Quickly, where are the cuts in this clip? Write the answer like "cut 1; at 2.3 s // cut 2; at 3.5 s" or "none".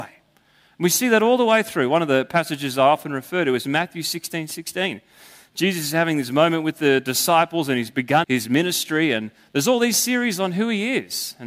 cut 1; at 8.2 s